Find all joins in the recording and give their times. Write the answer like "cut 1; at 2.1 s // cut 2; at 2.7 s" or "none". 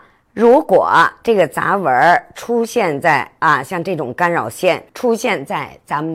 cut 1; at 4.9 s